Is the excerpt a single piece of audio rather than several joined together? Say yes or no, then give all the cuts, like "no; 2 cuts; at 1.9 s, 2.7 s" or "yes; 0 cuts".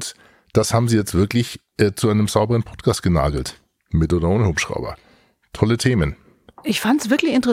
yes; 0 cuts